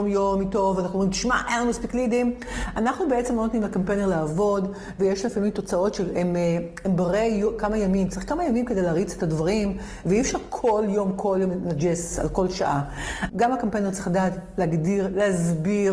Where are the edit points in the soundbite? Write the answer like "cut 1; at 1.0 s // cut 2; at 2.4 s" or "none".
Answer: cut 1; at 13.3 s